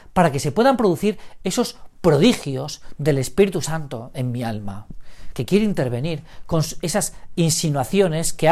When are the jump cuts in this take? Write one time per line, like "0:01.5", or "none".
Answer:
0:05.3